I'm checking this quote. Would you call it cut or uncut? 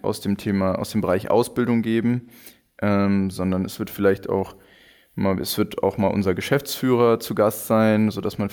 uncut